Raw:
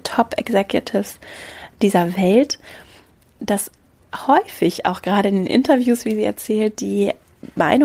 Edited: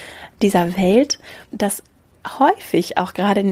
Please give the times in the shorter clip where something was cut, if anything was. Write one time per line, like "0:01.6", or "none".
0:01.4